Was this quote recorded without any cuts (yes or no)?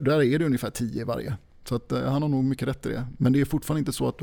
yes